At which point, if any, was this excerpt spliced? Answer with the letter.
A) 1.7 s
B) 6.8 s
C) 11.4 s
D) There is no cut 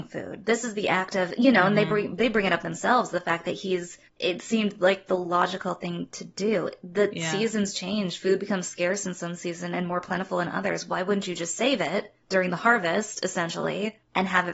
D